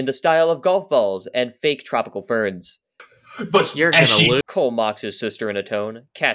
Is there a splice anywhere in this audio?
yes; 2 cuts; at 3.0 s, 4.4 s

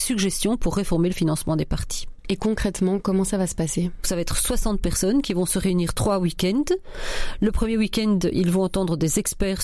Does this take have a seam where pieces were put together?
no; 0 cuts

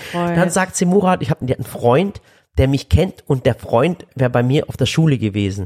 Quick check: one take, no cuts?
no; 2 cuts; at 1.4 s, 4.1 s

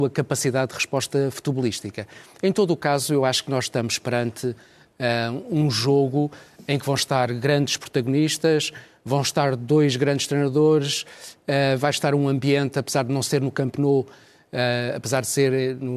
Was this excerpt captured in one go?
yes; 0 cuts

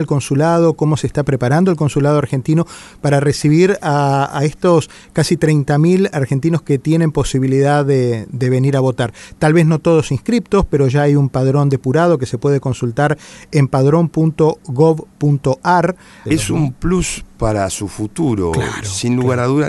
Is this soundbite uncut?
no; 1 cut; at 16.3 s

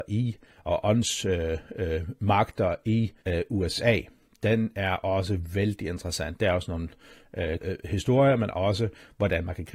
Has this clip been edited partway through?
yes; 2 cuts; at 3.2 s, 7.6 s

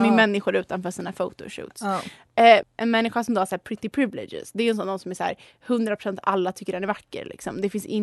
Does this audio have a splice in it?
yes; 1 cut; at 2.6 s

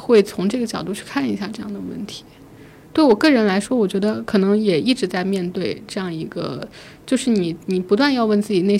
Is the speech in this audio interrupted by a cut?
yes; 1 cut; at 7.6 s

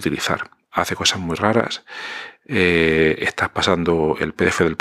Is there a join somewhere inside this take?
no; 0 cuts

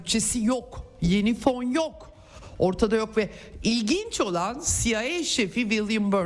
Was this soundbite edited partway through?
no; 0 cuts

